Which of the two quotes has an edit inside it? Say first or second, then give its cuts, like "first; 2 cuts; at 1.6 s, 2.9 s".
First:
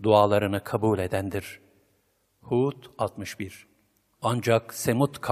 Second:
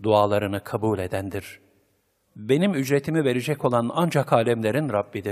second; 1 cut; at 2.3 s